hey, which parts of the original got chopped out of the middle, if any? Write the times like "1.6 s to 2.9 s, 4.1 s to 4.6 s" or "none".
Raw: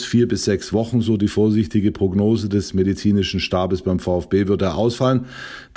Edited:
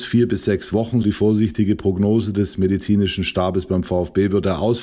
1.0 s to 1.2 s